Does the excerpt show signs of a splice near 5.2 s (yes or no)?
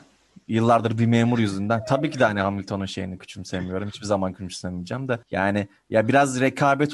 yes